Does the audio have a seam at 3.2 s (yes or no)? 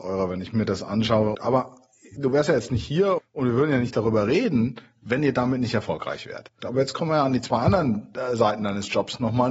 yes